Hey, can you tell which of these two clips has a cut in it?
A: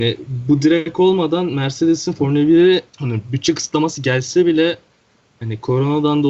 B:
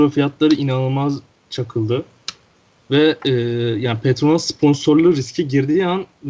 A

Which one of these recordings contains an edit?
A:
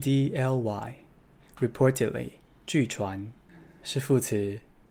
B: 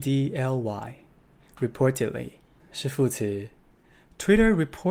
B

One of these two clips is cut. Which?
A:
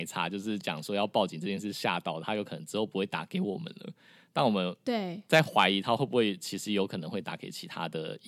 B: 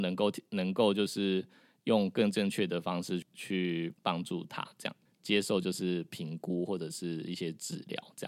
B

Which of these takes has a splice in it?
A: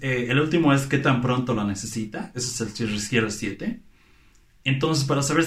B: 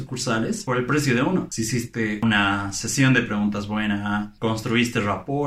B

